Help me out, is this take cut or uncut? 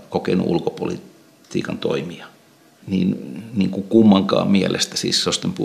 cut